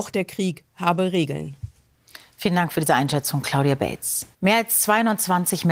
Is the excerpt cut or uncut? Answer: cut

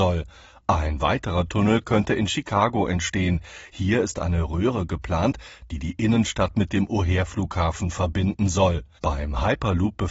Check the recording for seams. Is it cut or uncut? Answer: cut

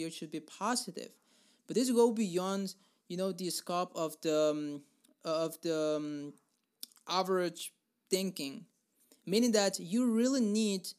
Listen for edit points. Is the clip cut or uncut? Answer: uncut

